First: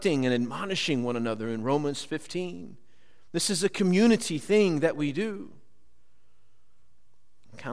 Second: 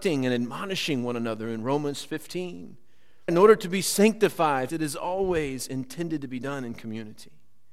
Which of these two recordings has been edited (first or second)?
second